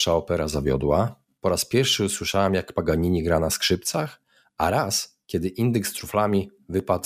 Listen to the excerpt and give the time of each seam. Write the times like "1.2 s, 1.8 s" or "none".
none